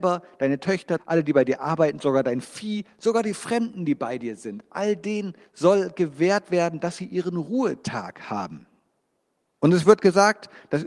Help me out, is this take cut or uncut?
cut